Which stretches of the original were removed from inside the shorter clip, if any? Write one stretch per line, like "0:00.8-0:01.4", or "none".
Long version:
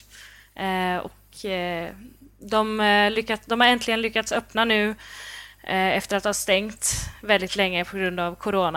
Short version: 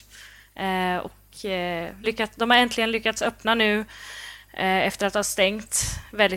0:02.0-0:03.1